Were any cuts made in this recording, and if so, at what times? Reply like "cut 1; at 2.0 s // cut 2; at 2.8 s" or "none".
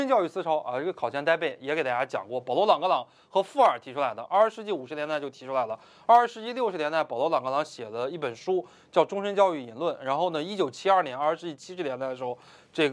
none

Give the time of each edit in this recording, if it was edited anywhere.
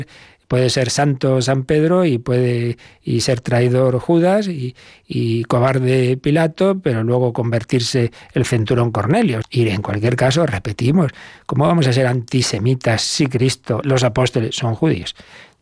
cut 1; at 9.4 s // cut 2; at 13.8 s

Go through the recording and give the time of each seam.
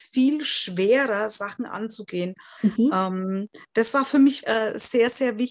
cut 1; at 2.6 s // cut 2; at 4.4 s

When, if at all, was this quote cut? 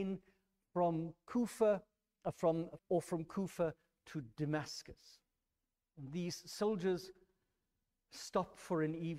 cut 1; at 2.8 s

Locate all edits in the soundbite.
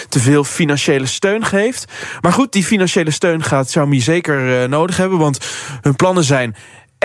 none

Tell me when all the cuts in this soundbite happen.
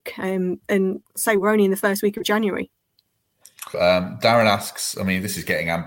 cut 1; at 3.7 s

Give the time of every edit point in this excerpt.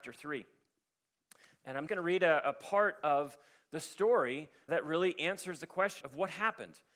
cut 1; at 1.9 s // cut 2; at 4.7 s // cut 3; at 6.0 s

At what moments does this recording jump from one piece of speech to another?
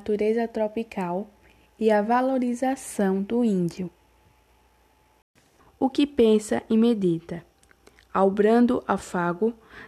cut 1; at 5.6 s

